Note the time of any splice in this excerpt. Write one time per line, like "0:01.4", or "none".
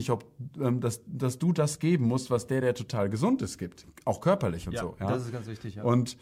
none